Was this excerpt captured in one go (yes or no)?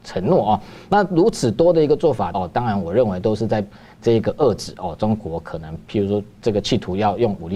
no